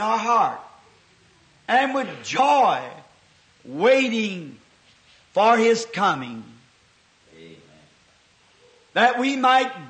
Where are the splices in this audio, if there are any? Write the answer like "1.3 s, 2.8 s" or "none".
7.2 s

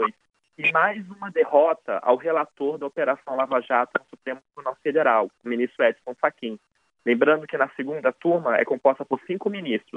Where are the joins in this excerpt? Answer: none

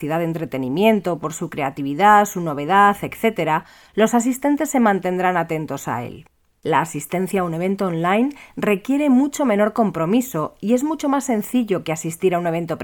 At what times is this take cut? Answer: 6.6 s

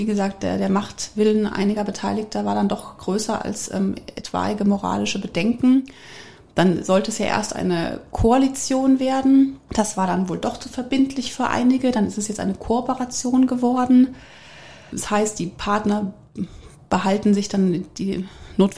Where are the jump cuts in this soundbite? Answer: none

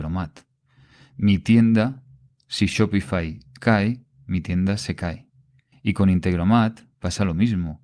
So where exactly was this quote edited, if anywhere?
5.7 s

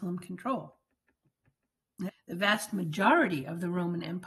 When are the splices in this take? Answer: 2.1 s

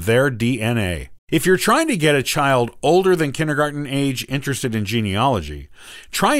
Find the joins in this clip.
1.2 s

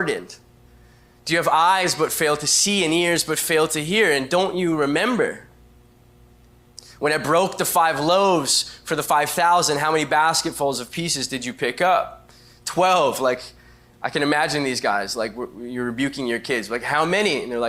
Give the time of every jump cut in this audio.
none

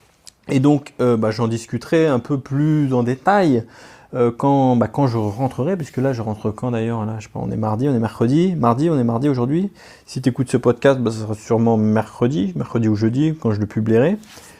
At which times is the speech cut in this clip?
none

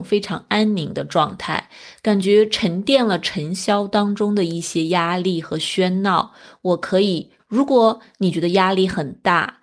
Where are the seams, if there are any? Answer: 7.4 s

